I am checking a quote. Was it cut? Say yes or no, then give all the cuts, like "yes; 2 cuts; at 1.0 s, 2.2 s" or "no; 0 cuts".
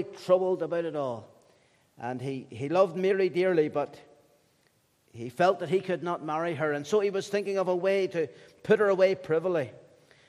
no; 0 cuts